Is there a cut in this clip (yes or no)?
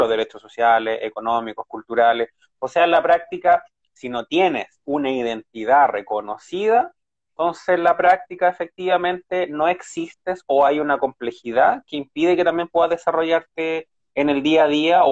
no